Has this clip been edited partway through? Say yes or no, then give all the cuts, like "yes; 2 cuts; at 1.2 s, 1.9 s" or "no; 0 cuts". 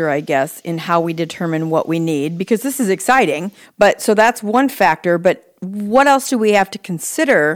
yes; 1 cut; at 3.6 s